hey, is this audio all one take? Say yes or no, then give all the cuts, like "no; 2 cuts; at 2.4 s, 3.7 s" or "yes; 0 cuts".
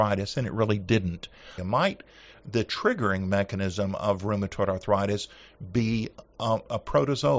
no; 1 cut; at 1.6 s